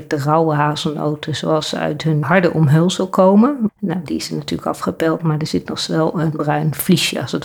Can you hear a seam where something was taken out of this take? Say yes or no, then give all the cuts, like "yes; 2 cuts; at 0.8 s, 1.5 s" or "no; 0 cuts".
yes; 2 cuts; at 2.2 s, 3.7 s